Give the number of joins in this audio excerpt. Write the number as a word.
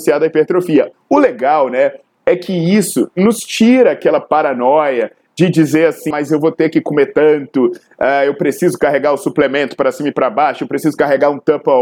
two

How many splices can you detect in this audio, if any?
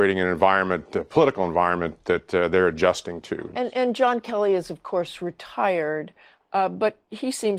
one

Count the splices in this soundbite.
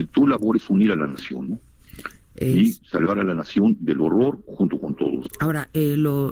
one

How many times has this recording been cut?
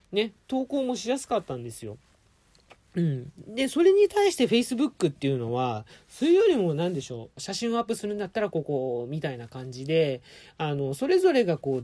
one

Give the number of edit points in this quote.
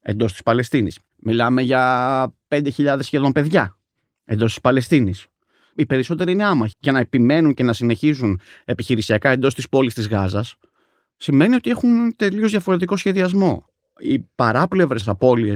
one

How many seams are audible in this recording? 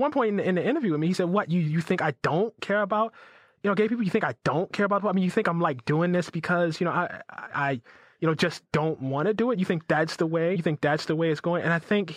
one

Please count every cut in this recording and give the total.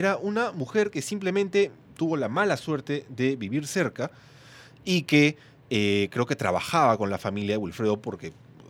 zero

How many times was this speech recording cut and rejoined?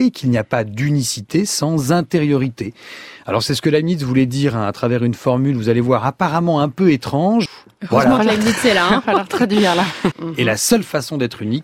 two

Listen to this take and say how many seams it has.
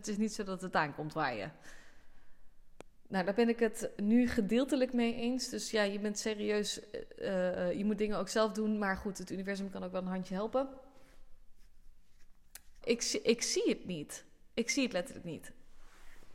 one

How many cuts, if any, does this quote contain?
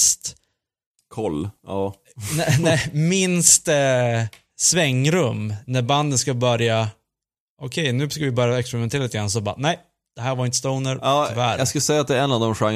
zero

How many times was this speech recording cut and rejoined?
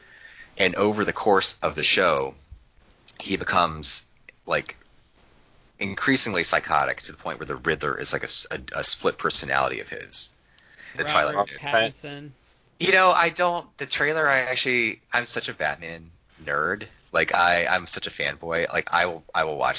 one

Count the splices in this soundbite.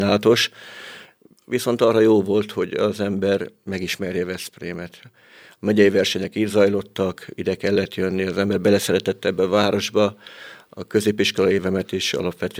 zero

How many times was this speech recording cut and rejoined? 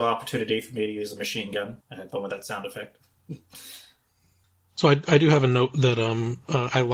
one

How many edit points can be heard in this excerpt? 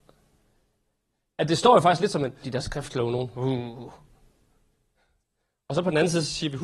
one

